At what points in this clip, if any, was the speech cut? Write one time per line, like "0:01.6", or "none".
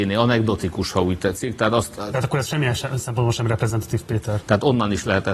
0:02.0
0:04.4